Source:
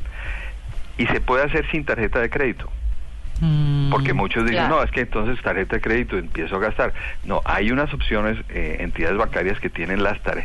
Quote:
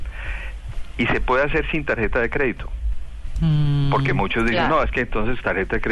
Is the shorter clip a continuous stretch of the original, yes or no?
yes